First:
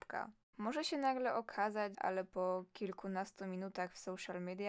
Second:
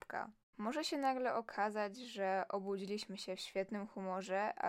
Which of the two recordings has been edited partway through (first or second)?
first